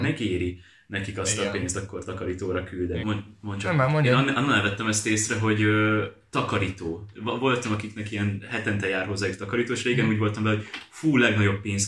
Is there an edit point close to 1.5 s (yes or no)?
no